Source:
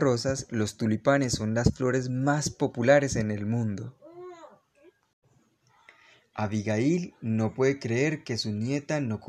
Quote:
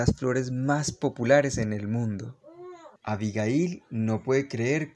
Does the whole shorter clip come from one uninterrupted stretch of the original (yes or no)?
no